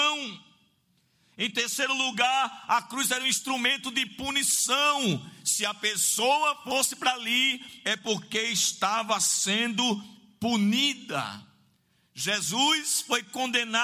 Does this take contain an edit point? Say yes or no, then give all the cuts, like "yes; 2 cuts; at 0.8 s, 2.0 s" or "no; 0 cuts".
no; 0 cuts